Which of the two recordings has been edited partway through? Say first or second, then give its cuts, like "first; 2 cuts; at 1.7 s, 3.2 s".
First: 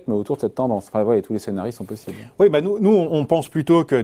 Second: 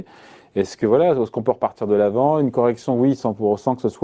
first; 1 cut; at 3.1 s